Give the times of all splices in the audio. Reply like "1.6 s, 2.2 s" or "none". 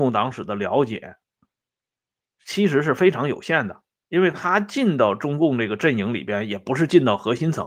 none